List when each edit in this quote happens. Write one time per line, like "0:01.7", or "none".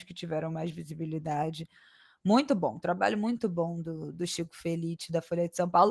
none